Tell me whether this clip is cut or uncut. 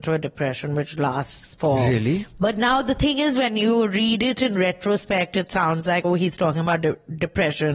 uncut